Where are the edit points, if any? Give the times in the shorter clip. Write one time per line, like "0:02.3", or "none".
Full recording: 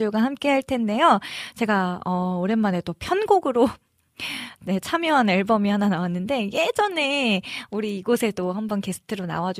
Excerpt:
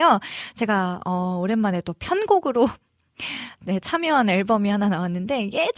none